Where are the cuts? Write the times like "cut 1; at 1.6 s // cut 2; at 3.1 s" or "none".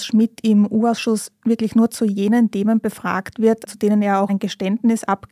cut 1; at 4.3 s